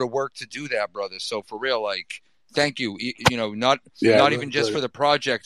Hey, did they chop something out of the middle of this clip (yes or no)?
no